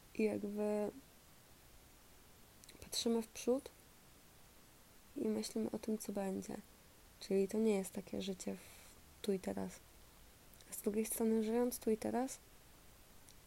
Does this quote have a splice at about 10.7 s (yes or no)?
no